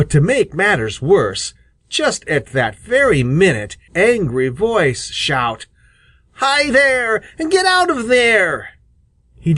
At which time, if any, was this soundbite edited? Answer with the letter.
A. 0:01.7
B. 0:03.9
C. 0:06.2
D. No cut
B